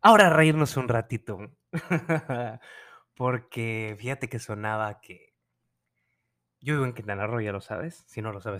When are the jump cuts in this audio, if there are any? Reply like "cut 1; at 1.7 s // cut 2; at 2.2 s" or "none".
none